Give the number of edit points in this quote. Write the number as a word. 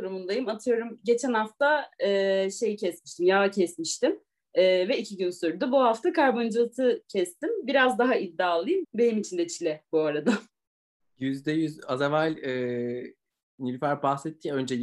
two